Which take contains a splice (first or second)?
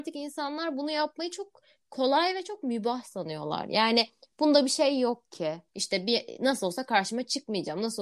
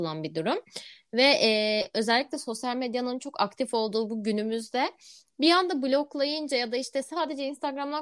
first